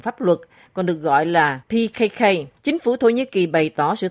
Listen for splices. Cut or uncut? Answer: cut